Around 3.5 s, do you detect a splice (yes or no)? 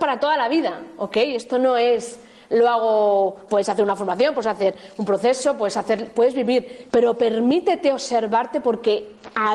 yes